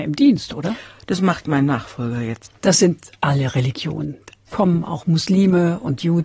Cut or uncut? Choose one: cut